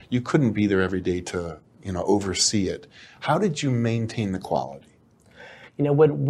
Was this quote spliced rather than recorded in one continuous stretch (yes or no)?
yes